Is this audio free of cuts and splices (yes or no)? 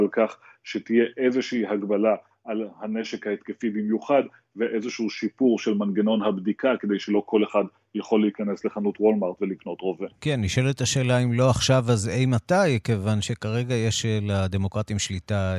yes